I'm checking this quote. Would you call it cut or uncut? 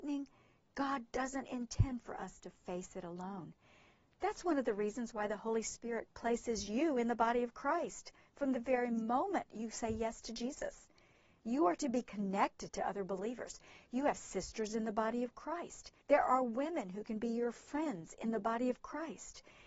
cut